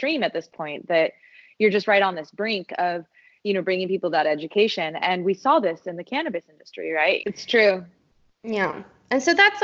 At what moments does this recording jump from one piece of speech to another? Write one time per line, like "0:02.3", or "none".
0:07.2